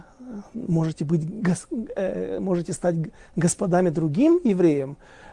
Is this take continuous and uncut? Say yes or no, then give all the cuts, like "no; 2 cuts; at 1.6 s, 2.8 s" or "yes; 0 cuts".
yes; 0 cuts